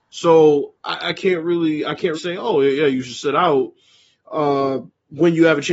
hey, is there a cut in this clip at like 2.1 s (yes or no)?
yes